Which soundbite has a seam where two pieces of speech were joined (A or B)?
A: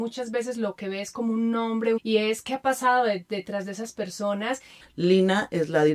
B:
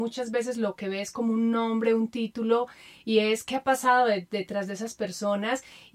A